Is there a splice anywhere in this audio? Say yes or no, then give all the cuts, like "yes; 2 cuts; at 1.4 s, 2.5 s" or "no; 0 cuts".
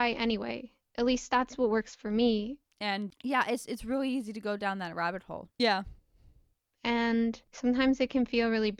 yes; 3 cuts; at 2.6 s, 5.5 s, 7.4 s